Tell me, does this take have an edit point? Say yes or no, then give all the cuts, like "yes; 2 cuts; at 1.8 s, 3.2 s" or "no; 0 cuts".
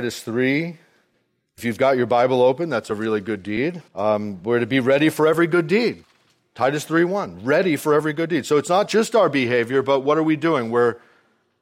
yes; 1 cut; at 3.9 s